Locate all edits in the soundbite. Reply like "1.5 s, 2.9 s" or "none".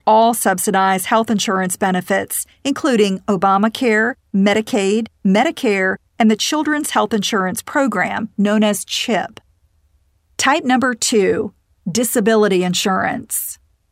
none